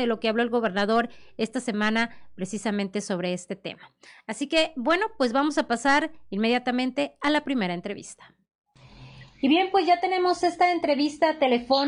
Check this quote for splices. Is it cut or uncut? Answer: uncut